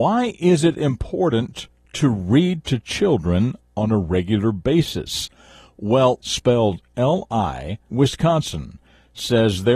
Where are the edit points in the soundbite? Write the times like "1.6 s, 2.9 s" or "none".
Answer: 6.2 s, 7.9 s